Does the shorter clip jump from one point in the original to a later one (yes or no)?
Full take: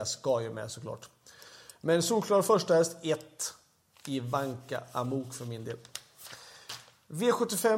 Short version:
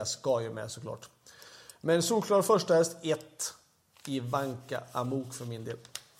no